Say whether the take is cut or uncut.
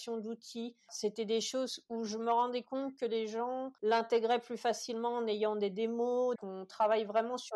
cut